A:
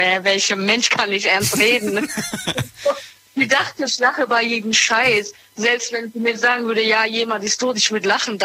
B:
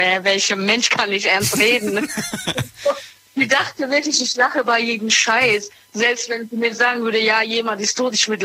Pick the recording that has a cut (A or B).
A